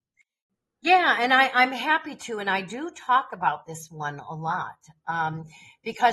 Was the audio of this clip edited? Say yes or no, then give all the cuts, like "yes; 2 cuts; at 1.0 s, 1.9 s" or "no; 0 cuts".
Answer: no; 0 cuts